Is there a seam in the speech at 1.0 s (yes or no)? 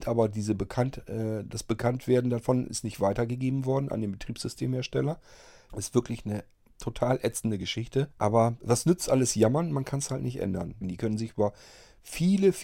no